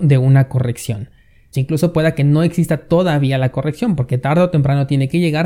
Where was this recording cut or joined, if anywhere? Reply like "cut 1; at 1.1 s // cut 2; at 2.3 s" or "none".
cut 1; at 1.5 s